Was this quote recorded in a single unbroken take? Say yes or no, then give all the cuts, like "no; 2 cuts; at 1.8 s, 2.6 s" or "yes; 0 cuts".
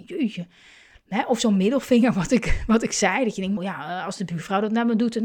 no; 1 cut; at 3.6 s